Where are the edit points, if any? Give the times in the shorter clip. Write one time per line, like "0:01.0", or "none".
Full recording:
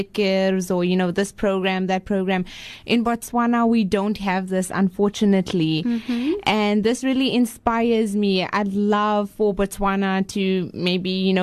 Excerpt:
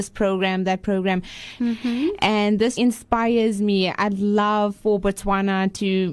0:01.6
0:02.8